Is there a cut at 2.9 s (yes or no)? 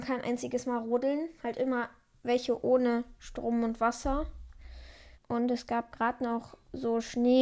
no